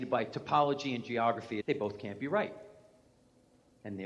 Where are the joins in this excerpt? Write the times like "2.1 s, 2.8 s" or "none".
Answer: 1.6 s